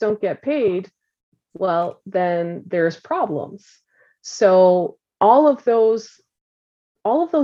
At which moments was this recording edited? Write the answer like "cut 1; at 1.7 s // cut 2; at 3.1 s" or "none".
none